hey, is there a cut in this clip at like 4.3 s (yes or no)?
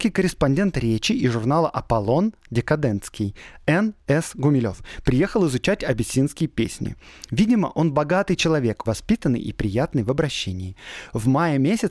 no